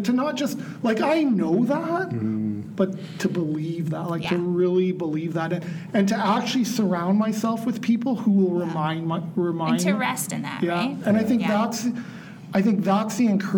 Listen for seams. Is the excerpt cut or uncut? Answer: uncut